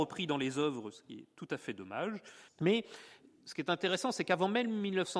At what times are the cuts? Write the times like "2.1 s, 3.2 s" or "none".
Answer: 2.5 s